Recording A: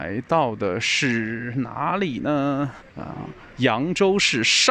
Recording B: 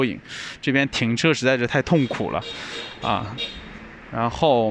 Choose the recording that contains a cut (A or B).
A